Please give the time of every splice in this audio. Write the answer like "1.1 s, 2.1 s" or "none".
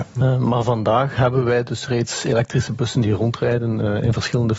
none